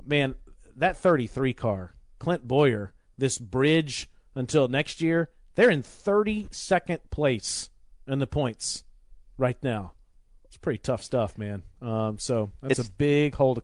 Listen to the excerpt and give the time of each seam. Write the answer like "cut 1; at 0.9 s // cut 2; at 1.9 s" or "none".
none